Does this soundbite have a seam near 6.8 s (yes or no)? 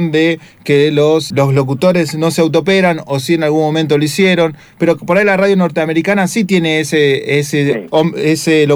no